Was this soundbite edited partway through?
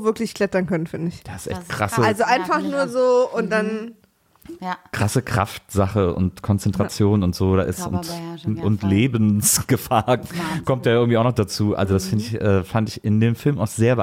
no; 0 cuts

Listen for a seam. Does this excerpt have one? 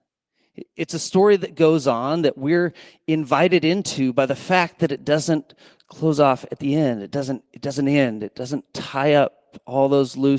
no; 0 cuts

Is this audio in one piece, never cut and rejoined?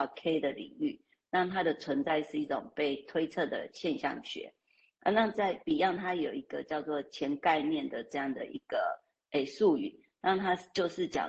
yes; 0 cuts

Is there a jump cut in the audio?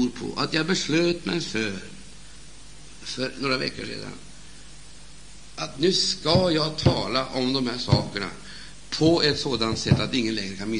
no; 0 cuts

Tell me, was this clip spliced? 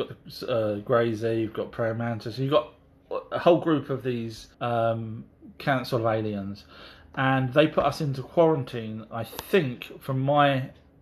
yes; 1 cut; at 4.5 s

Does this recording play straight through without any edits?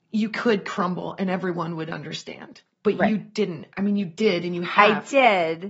yes; 0 cuts

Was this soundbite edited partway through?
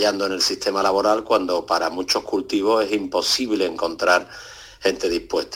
no; 0 cuts

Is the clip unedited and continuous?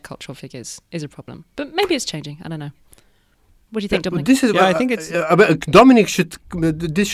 yes; 0 cuts

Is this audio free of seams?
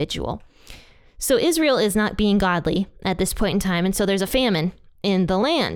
yes; 0 cuts

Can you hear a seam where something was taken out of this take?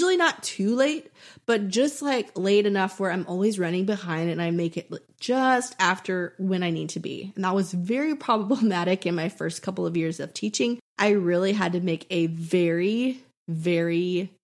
no; 0 cuts

